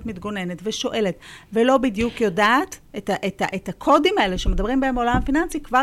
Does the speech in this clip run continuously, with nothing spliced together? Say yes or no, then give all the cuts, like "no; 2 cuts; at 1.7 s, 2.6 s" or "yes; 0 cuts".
yes; 0 cuts